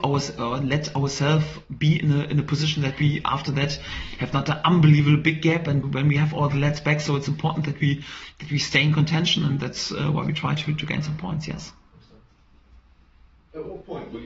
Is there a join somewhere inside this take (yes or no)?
yes